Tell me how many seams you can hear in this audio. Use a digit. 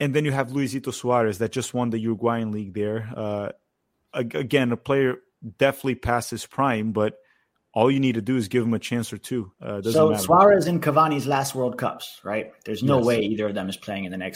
1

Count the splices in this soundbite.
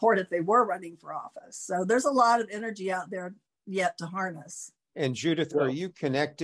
0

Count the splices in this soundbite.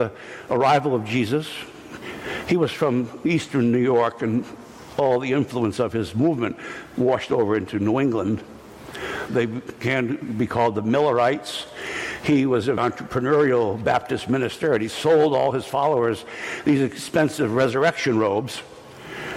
2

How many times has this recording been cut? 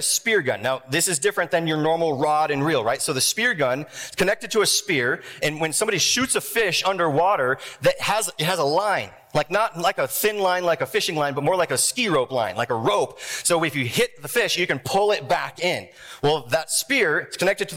0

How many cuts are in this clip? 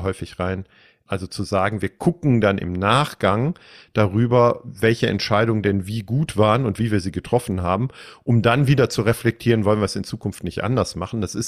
1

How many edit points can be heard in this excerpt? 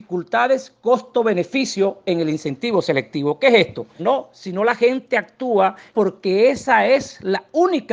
2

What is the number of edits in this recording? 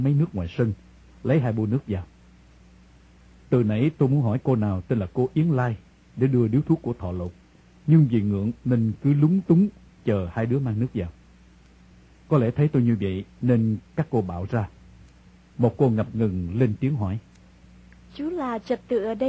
1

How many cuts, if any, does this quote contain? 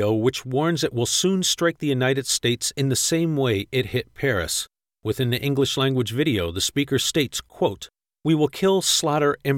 0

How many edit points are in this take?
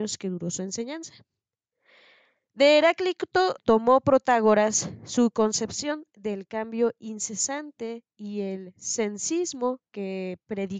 1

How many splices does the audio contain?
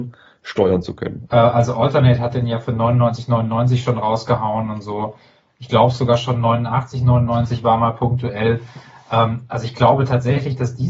1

